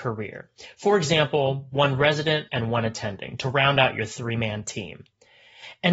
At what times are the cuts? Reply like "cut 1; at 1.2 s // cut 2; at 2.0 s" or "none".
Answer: cut 1; at 2.5 s